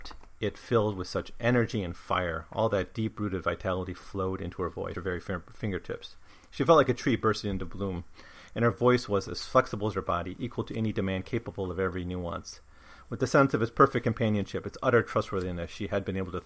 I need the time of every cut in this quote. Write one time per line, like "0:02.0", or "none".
0:04.9